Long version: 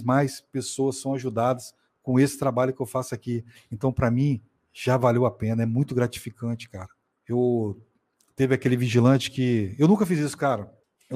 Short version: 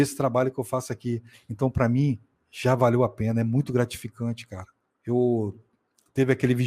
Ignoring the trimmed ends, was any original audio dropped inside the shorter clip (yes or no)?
no